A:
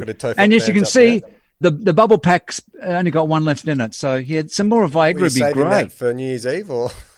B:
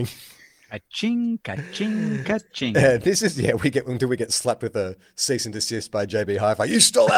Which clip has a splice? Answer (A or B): A